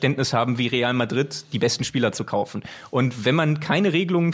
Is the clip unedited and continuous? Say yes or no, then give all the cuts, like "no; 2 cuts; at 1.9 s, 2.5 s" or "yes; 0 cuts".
yes; 0 cuts